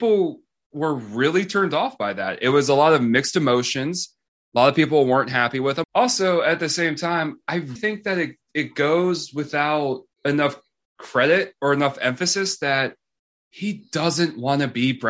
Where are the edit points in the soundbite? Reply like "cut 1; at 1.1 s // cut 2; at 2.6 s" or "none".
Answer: cut 1; at 5.8 s // cut 2; at 7.8 s // cut 3; at 10.1 s